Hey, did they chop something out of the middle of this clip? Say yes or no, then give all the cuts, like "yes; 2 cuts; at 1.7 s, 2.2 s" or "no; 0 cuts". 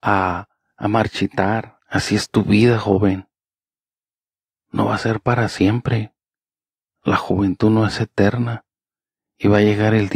yes; 1 cut; at 1.8 s